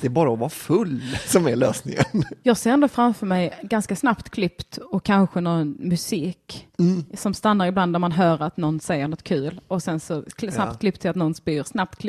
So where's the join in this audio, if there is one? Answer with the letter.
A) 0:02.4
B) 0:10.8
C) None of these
A